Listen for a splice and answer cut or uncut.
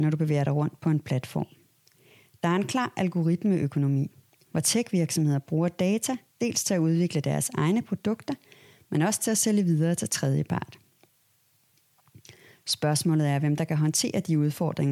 uncut